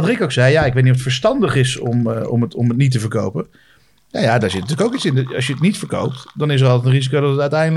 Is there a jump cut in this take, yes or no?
no